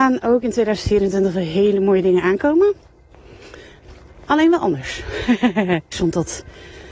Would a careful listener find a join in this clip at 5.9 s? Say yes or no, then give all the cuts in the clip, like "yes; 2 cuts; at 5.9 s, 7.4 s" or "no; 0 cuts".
yes; 1 cut; at 5.9 s